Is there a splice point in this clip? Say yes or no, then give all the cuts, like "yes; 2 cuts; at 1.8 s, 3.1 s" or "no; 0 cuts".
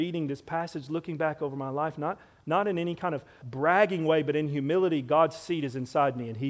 yes; 1 cut; at 3.4 s